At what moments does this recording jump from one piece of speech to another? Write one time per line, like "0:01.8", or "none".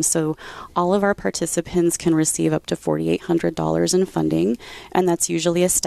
none